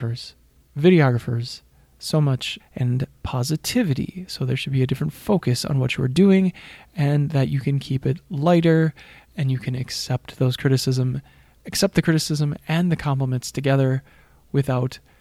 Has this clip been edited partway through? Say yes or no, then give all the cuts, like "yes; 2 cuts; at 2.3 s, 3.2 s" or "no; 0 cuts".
yes; 1 cut; at 2.6 s